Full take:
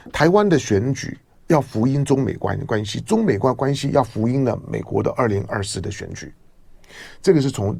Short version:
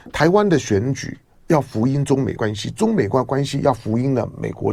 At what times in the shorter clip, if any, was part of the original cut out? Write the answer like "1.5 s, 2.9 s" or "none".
2.4 s